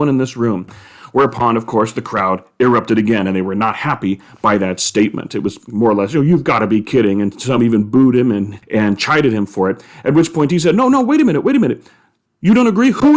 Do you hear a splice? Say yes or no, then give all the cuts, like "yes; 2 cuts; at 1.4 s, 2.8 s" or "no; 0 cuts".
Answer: no; 0 cuts